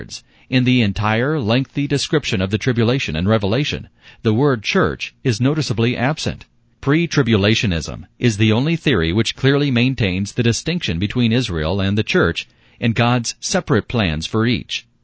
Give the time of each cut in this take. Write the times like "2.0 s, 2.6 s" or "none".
6.7 s